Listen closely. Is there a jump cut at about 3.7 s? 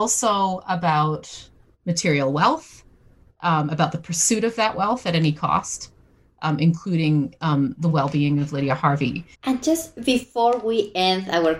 no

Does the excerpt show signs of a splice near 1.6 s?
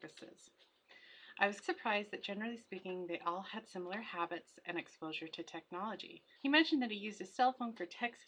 yes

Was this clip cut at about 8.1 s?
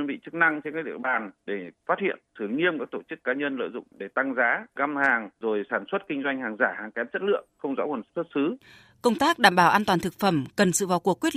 yes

